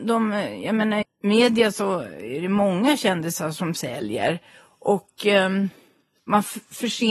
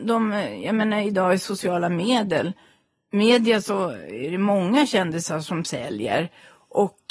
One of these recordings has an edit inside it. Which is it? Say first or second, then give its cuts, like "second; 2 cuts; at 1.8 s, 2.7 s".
first; 1 cut; at 1.0 s